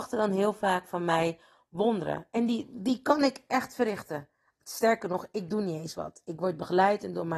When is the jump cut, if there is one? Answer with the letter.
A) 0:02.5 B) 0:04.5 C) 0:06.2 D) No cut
D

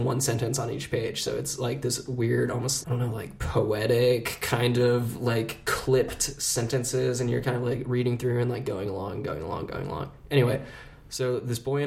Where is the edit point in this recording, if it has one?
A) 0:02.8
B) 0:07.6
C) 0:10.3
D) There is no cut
A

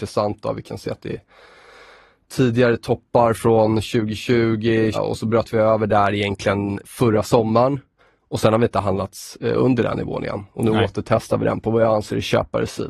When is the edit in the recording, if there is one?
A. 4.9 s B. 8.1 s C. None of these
A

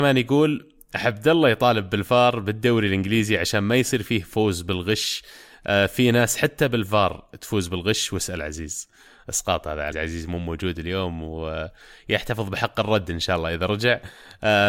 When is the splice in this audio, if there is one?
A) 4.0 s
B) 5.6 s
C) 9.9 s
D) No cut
C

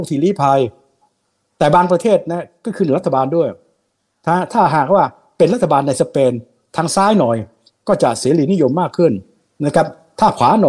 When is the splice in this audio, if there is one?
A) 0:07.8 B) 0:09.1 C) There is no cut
C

